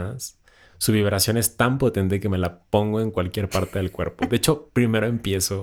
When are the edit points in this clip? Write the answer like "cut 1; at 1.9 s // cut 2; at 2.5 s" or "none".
none